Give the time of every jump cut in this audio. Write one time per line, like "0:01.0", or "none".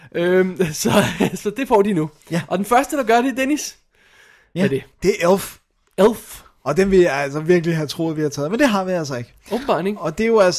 0:04.9